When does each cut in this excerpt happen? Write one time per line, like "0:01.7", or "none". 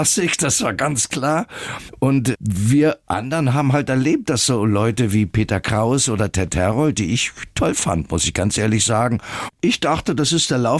none